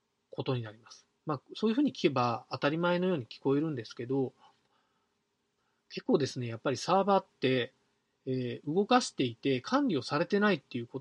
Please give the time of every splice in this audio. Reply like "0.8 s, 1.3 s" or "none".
none